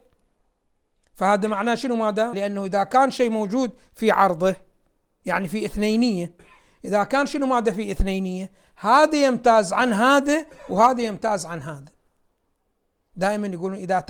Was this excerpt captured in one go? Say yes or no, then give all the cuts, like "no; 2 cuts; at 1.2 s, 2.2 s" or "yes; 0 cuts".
no; 1 cut; at 2.3 s